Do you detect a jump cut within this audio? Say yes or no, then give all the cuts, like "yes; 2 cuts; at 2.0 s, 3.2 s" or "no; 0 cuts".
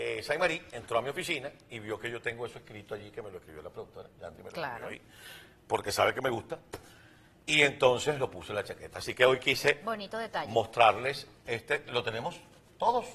no; 0 cuts